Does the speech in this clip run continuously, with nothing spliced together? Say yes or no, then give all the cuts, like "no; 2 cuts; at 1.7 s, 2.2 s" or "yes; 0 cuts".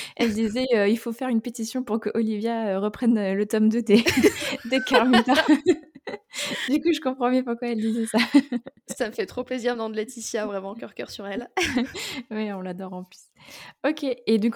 yes; 0 cuts